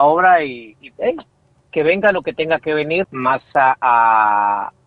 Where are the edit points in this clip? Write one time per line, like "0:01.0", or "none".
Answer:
0:00.9
0:03.0